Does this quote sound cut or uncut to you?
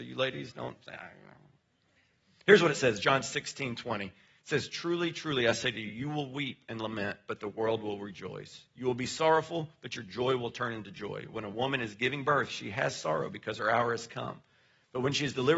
uncut